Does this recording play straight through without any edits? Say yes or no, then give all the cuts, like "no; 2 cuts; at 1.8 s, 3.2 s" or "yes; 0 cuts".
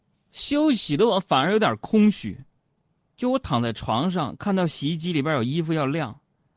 yes; 0 cuts